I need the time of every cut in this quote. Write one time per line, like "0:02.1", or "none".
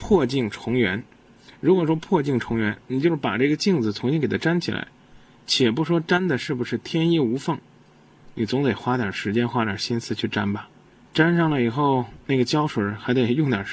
none